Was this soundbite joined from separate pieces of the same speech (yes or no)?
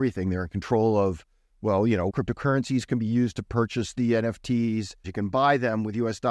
yes